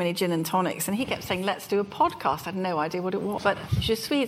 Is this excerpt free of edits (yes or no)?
no